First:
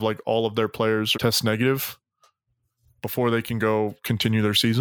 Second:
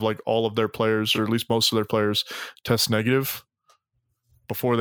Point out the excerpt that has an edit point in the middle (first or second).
first